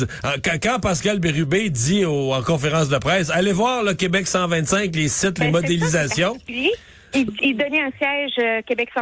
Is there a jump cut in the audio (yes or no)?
yes